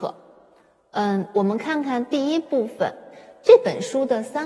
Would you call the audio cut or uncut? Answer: uncut